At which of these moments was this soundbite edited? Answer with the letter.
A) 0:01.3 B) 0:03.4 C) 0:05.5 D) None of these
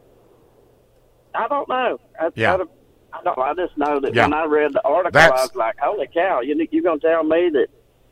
B